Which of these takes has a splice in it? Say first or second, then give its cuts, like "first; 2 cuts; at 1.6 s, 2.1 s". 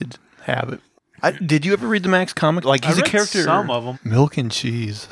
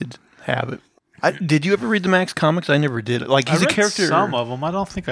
first; 2 cuts; at 2.6 s, 3.9 s